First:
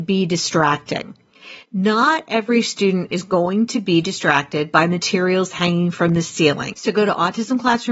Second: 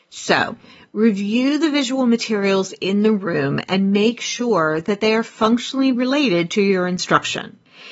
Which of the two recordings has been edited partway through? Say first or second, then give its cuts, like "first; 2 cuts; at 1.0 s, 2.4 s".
first; 1 cut; at 6.7 s